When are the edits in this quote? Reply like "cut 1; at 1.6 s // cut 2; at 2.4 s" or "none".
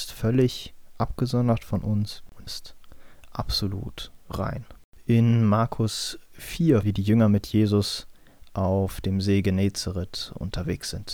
cut 1; at 2.5 s // cut 2; at 6.8 s